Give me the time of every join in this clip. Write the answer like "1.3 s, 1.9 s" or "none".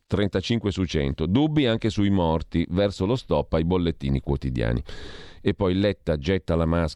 none

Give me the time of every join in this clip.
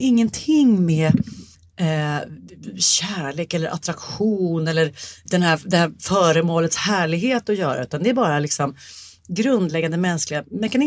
5.3 s

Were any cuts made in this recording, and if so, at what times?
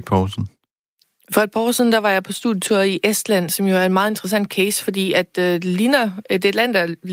none

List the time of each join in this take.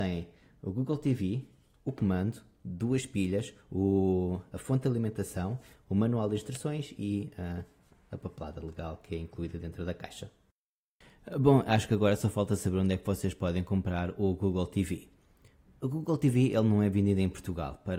none

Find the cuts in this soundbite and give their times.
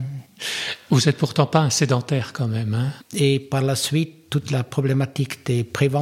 3.0 s

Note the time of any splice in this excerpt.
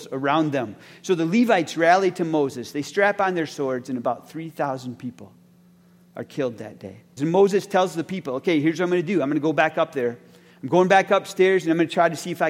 7.2 s

